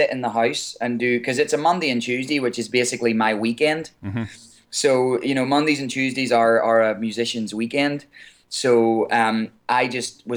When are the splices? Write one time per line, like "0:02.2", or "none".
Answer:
none